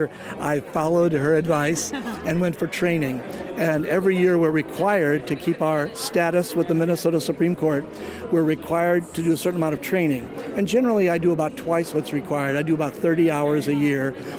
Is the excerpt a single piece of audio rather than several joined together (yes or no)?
yes